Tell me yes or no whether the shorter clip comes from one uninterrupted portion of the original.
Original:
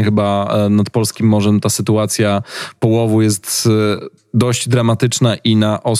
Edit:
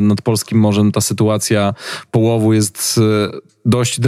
yes